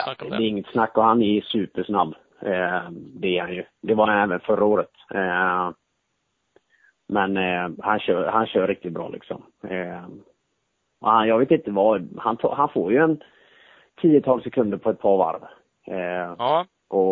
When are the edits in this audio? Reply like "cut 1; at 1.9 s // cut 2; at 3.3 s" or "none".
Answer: none